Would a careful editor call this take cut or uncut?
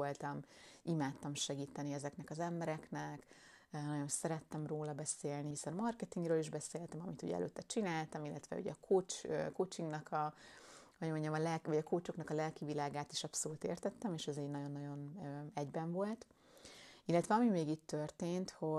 cut